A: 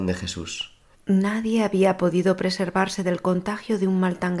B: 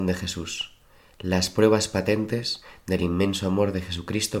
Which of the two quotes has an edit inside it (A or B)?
A